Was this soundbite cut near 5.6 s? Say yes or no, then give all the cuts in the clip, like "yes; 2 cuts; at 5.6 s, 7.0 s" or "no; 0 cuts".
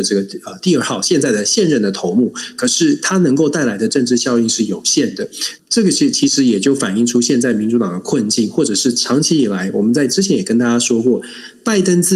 yes; 1 cut; at 5.6 s